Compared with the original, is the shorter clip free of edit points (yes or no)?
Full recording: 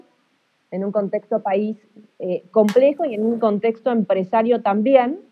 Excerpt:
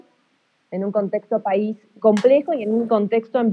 no